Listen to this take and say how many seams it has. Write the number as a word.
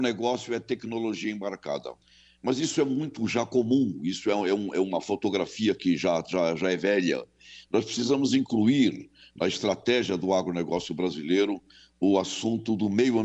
zero